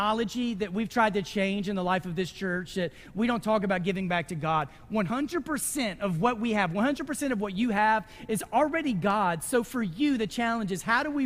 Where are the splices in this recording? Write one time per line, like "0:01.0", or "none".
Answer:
none